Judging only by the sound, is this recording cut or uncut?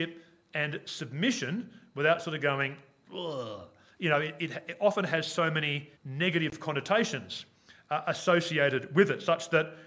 cut